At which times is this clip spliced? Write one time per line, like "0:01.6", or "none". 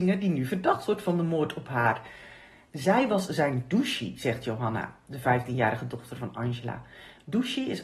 none